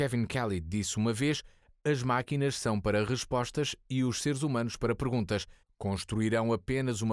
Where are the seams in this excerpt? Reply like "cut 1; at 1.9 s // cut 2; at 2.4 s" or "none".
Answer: cut 1; at 5.6 s